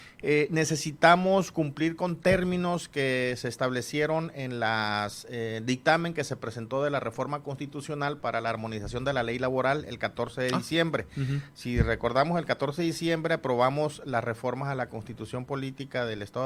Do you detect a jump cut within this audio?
no; 0 cuts

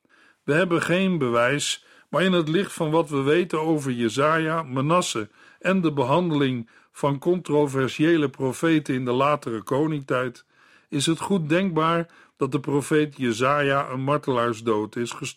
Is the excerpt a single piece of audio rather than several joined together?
yes; 0 cuts

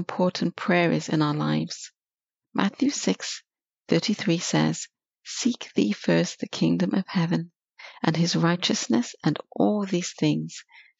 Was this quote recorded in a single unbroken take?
yes; 0 cuts

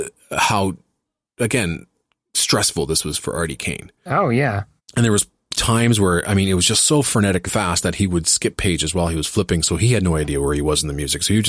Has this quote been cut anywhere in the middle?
yes; 2 cuts; at 4.8 s, 7.5 s

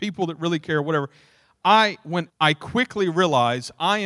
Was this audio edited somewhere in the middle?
yes; 1 cut; at 2.3 s

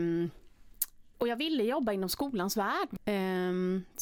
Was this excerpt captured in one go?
no; 2 cuts; at 1.1 s, 3.0 s

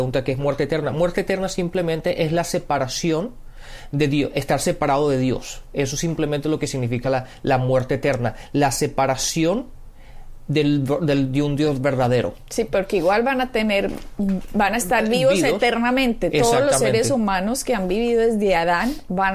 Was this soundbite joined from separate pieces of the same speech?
no; 0 cuts

